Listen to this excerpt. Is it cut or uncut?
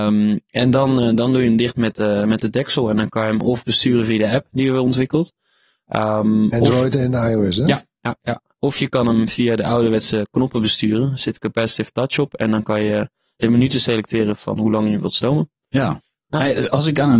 uncut